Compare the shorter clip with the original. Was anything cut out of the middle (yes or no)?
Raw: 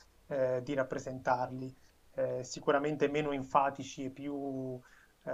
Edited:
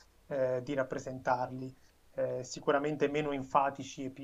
no